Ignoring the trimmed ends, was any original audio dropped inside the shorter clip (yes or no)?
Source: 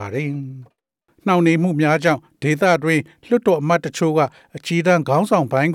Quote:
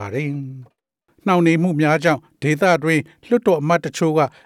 no